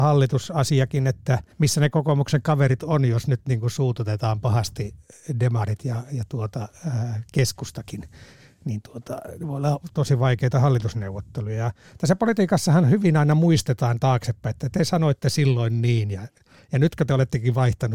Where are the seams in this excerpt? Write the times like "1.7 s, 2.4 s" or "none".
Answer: 1.5 s

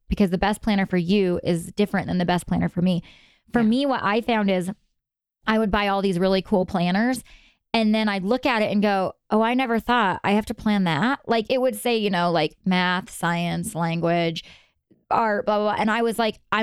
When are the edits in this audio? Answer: none

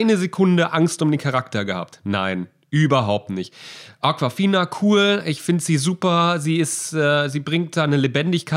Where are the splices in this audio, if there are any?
none

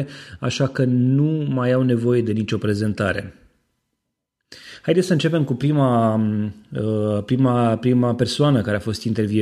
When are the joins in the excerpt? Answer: none

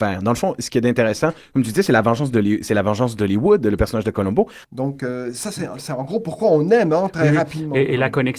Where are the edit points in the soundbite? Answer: 4.6 s

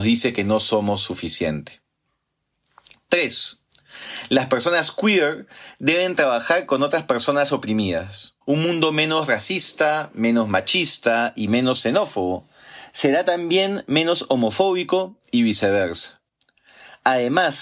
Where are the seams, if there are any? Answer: 8.4 s

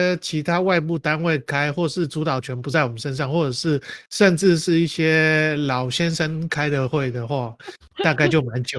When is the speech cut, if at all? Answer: none

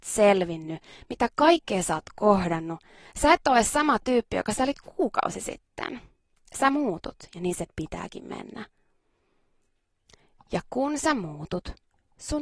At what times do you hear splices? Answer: none

